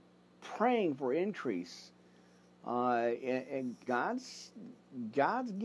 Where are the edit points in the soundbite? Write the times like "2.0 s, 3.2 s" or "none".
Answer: 3.9 s